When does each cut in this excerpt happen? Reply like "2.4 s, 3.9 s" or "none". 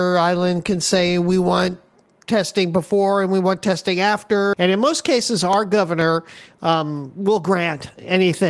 4.5 s